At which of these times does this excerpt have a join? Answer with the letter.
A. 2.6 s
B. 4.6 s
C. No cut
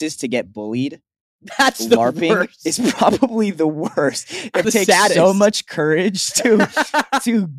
B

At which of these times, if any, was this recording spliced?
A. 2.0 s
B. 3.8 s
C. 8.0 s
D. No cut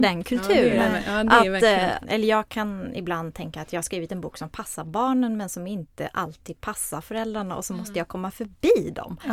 A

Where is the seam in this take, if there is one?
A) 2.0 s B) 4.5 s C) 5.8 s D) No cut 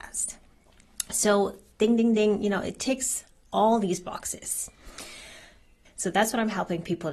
C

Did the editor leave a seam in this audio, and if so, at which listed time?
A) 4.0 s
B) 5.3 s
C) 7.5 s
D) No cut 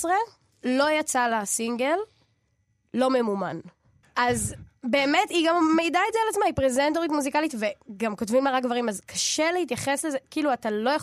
A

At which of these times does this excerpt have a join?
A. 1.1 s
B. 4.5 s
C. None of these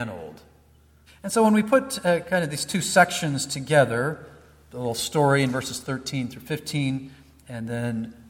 A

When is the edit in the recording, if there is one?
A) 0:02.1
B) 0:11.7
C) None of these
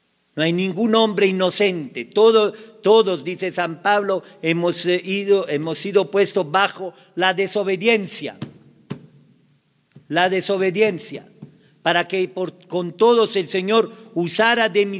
C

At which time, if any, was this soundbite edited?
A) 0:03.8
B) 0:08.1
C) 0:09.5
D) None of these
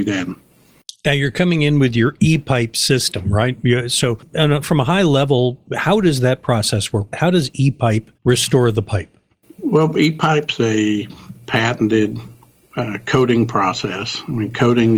B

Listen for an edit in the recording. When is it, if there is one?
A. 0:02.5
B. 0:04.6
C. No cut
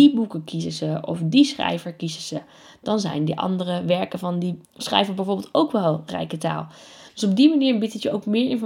B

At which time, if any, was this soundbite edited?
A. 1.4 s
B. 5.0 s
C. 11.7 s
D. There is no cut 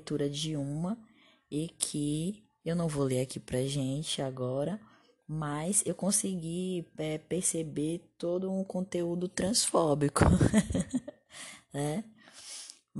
D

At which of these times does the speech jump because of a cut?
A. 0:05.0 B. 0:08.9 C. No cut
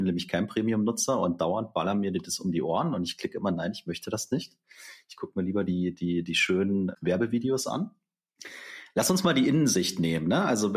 C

